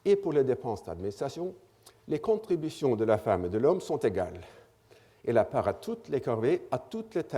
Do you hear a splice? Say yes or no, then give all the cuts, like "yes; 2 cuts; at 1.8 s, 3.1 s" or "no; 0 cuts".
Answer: no; 0 cuts